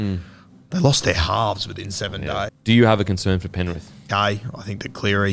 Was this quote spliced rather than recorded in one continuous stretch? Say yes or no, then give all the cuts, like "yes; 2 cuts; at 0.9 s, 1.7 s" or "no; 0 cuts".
yes; 2 cuts; at 2.5 s, 4.1 s